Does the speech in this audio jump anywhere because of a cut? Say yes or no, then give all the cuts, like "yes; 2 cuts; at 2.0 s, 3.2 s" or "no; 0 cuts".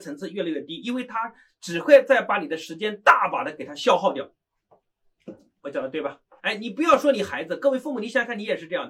yes; 1 cut; at 6.4 s